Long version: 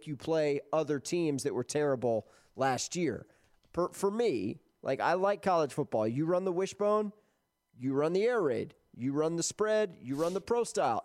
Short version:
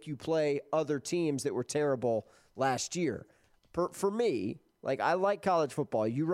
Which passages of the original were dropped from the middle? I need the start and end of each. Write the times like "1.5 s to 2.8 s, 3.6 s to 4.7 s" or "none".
none